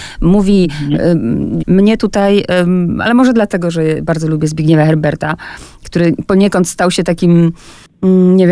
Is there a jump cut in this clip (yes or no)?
yes